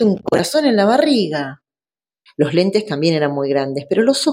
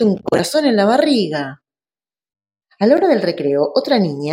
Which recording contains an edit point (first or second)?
first